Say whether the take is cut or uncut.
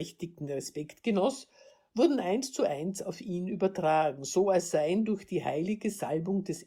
uncut